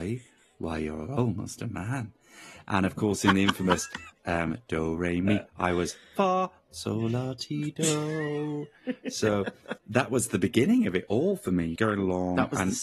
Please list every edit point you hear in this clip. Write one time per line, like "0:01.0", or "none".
0:09.8
0:11.8